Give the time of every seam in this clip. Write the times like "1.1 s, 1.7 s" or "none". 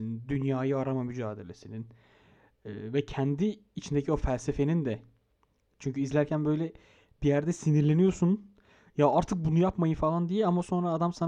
none

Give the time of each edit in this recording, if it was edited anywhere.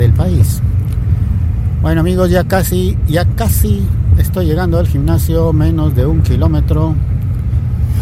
none

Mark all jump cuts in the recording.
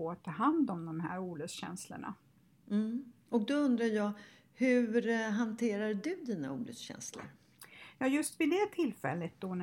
none

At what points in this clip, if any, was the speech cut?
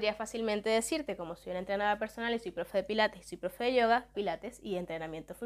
4.1 s

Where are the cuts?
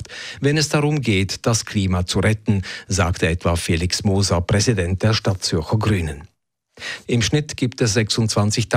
7.0 s

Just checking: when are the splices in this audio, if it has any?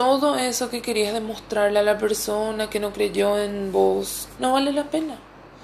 4.4 s

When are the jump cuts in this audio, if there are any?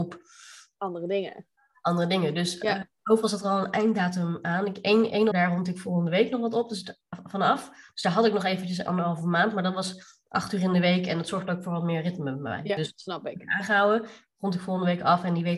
5.3 s

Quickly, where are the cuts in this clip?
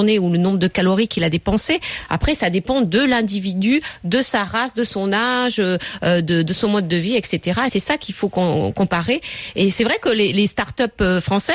none

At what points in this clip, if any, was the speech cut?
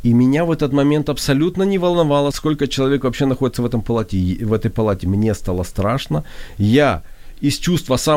2.3 s

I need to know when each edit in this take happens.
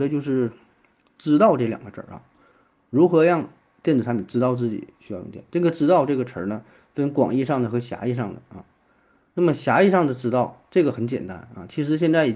none

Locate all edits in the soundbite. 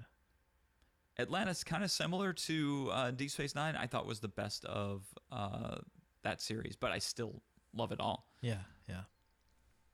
none

